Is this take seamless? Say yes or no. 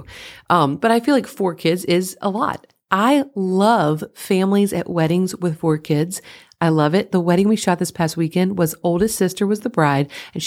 yes